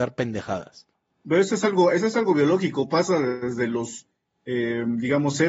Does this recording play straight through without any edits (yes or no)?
yes